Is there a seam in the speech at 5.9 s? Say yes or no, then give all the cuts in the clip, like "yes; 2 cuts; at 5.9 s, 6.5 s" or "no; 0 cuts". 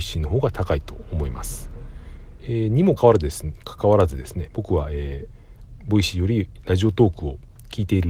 no; 2 cuts; at 3.0 s, 4.5 s